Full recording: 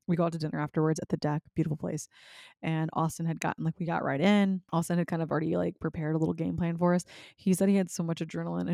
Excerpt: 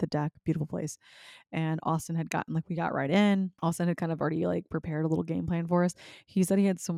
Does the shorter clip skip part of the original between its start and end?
no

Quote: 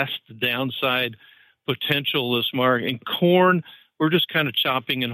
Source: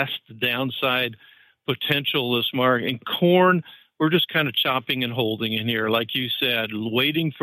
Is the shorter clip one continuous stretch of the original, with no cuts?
yes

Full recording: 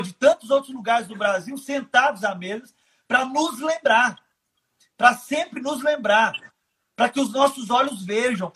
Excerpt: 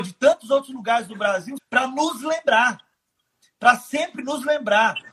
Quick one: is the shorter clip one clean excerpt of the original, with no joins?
no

